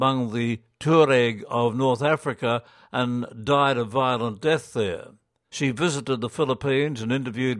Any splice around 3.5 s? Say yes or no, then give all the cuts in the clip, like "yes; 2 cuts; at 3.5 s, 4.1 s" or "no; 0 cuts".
no; 1 cut; at 5.5 s